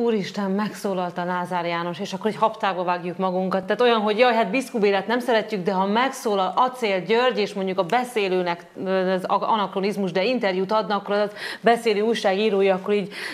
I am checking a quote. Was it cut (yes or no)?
no